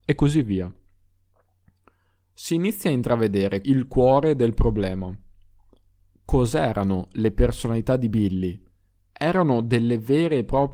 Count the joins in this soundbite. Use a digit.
1